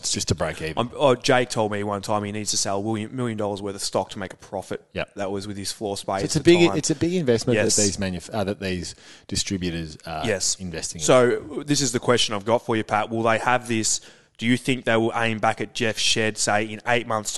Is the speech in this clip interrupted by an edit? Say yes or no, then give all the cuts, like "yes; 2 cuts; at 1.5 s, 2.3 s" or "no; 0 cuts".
no; 0 cuts